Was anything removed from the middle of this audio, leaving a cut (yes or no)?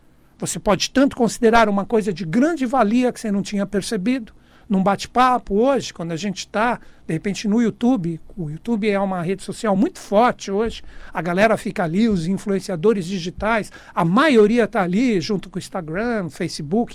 no